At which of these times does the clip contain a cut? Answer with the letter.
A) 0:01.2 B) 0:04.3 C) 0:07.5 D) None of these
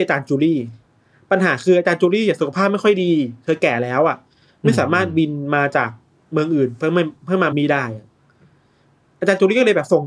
C